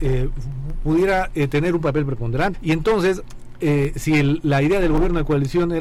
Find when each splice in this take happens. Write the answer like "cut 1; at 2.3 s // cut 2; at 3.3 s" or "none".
cut 1; at 2.5 s